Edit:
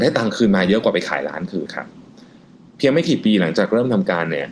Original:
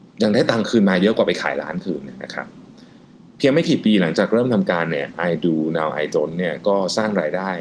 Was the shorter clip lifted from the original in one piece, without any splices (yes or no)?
no